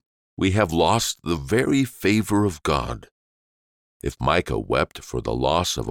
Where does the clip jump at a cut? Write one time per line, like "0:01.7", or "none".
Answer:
none